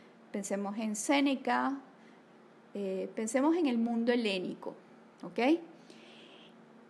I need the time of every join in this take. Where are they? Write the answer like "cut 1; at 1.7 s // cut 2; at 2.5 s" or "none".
none